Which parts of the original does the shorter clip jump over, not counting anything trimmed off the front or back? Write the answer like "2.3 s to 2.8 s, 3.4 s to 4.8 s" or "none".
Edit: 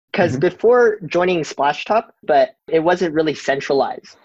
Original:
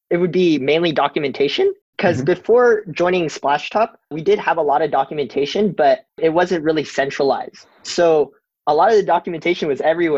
4.1 s to 5.7 s